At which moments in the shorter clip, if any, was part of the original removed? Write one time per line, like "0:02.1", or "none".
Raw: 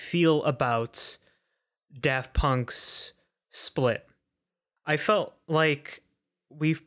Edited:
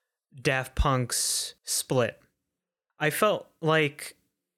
0:01.6